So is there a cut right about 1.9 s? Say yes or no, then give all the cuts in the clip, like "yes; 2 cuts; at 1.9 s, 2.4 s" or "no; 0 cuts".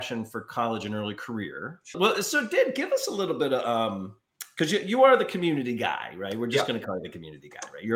yes; 1 cut; at 1.9 s